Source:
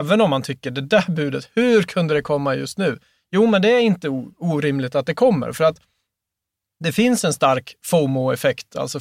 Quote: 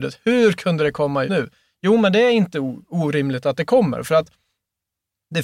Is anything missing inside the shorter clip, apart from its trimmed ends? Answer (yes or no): yes